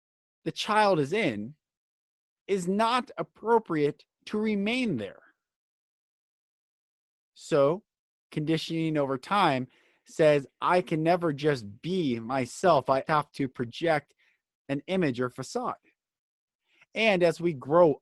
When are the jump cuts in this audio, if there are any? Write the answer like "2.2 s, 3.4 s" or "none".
13.1 s